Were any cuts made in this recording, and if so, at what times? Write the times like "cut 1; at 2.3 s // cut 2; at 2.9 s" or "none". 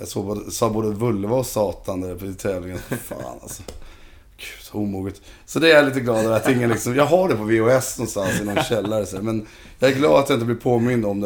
none